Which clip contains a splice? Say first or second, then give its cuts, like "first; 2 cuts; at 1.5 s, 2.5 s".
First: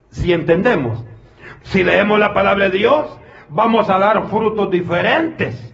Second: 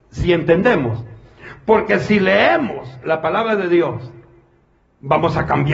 first; 1 cut; at 1.6 s